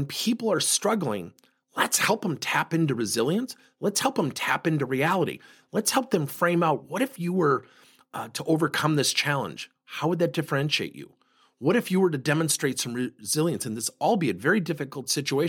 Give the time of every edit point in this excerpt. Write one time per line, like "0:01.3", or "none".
none